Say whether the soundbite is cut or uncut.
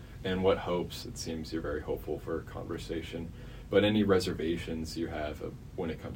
cut